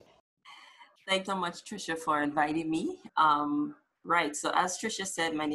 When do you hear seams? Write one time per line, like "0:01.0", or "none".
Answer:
0:01.3
0:03.1